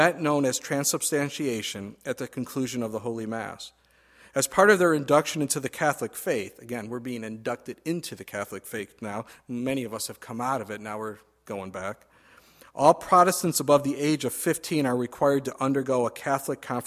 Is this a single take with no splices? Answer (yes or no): yes